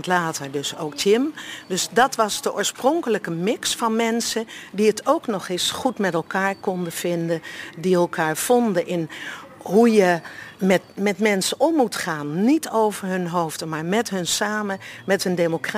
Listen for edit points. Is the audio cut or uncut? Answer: cut